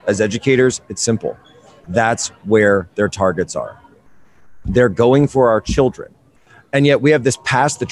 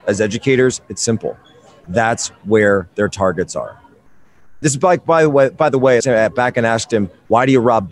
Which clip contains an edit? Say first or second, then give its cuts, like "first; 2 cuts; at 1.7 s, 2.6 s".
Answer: second; 2 cuts; at 4.6 s, 6.0 s